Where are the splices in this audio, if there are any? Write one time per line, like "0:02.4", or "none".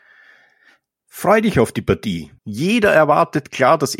0:02.4

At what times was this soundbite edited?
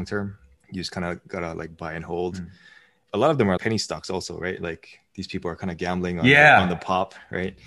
0:03.6

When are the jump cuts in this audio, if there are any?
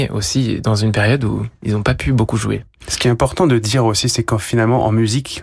none

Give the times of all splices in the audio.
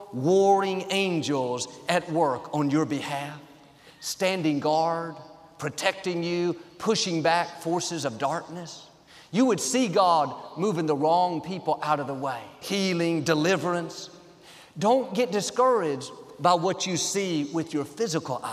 0:12.6

